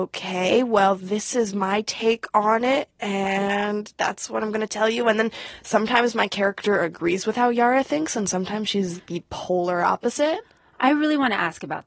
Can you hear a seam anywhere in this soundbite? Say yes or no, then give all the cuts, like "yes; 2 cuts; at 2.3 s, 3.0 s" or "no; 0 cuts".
no; 0 cuts